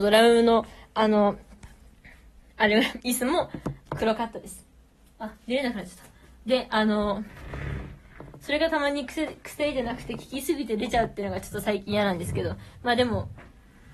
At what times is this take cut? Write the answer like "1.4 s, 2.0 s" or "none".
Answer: 5.0 s